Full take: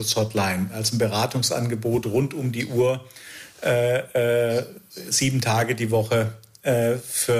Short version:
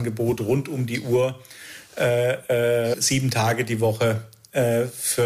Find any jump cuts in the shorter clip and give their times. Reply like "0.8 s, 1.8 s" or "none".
2.9 s